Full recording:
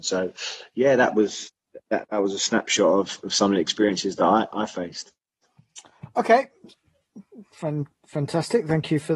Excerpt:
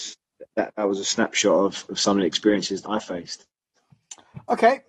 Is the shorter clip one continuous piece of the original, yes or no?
no